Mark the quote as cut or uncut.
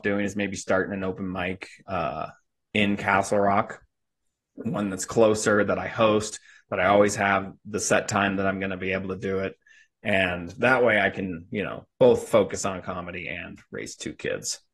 uncut